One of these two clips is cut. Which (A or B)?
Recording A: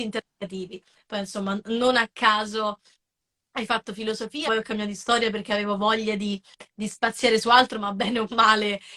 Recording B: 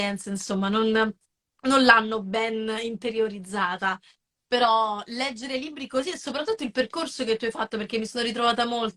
A